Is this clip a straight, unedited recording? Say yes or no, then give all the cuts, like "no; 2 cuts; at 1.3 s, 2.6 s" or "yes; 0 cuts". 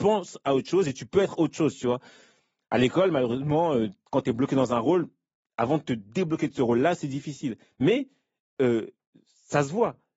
yes; 0 cuts